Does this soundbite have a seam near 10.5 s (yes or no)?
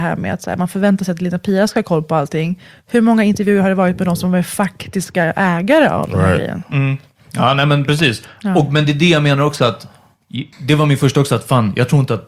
yes